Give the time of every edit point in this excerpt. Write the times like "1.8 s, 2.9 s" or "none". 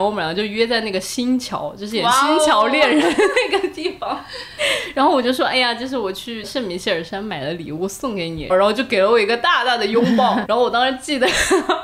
8.5 s, 10.4 s